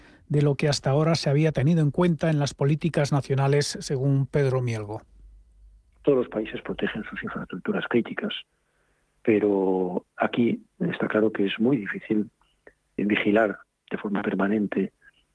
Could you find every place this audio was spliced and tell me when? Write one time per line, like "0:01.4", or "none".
0:13.0